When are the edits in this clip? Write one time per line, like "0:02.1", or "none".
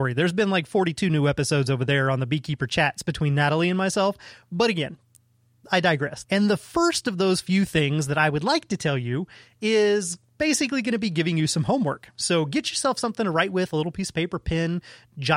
0:06.2